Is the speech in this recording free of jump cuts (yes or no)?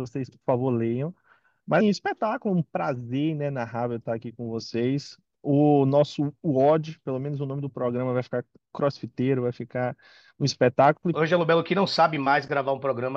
no